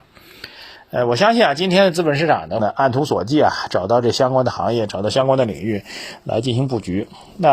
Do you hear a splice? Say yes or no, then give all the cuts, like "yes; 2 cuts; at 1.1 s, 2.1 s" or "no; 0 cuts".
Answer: yes; 1 cut; at 2.6 s